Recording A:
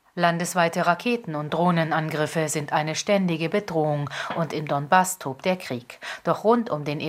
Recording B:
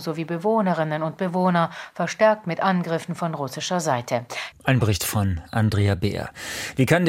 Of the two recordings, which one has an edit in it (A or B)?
B